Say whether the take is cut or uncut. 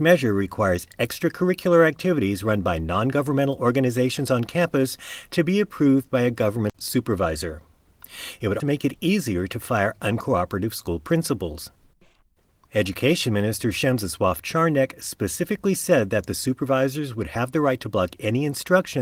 cut